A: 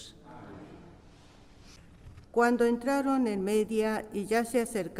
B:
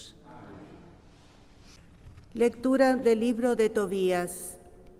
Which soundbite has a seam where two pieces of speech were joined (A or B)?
A